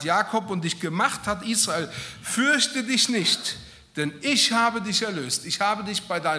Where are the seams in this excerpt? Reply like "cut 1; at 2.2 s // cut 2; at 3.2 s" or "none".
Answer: none